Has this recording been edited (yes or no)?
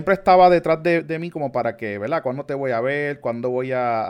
no